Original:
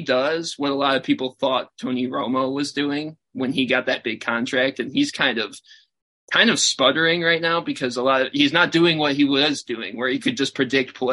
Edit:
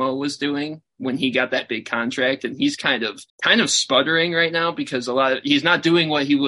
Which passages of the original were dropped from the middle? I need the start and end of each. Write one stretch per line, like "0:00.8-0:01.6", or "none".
0:05.6-0:06.2